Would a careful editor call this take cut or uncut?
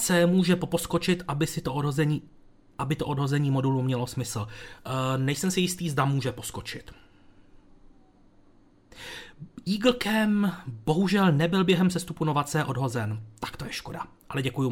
uncut